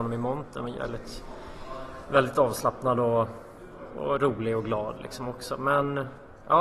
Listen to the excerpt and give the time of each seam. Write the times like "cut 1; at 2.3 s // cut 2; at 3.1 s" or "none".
none